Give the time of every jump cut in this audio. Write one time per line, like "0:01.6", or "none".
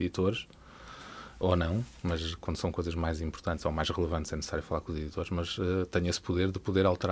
0:01.4